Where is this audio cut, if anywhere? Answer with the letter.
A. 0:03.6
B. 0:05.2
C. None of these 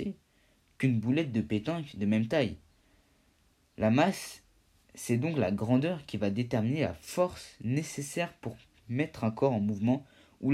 C